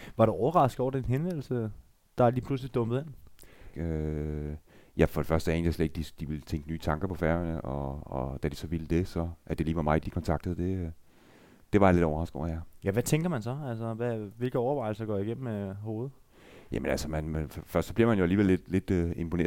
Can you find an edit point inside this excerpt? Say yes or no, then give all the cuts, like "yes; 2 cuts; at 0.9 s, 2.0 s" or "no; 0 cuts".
yes; 2 cuts; at 3.7 s, 10.0 s